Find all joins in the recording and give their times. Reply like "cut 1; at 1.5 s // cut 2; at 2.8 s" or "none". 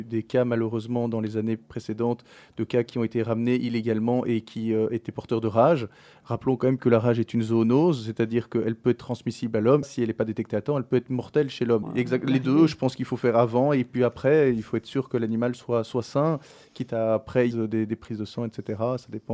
cut 1; at 9.8 s // cut 2; at 11.8 s // cut 3; at 17.5 s

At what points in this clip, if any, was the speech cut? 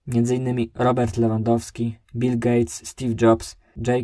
cut 1; at 2.0 s

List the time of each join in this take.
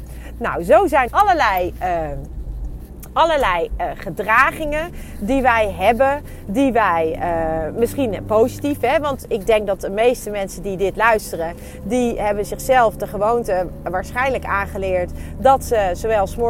cut 1; at 1.1 s

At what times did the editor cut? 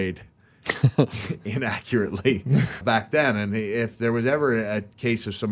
cut 1; at 2.8 s

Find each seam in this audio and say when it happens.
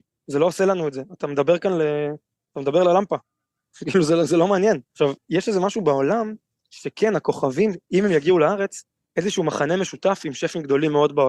cut 1; at 4.9 s // cut 2; at 9.0 s

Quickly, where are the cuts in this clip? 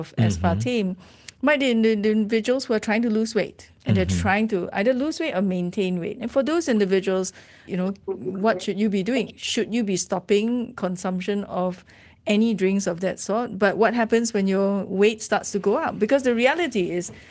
cut 1; at 7.7 s

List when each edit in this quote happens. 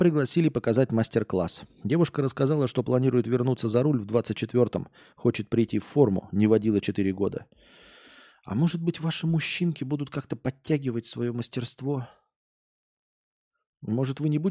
none

